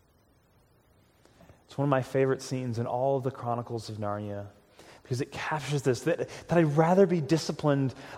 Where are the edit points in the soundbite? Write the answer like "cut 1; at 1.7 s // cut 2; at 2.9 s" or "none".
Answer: none